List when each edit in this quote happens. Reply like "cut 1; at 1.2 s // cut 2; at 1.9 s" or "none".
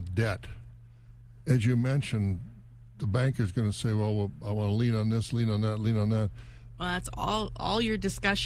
cut 1; at 6.8 s